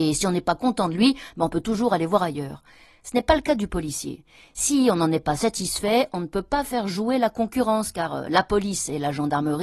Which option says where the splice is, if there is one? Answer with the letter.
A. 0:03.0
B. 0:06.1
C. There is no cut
C